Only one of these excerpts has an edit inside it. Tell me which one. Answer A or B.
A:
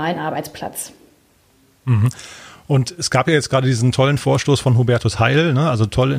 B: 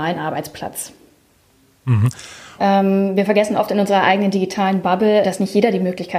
B